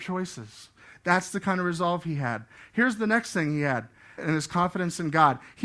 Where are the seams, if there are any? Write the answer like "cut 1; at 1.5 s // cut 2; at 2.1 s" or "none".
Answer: cut 1; at 4.2 s